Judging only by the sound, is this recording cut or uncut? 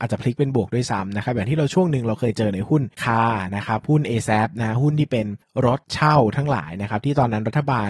cut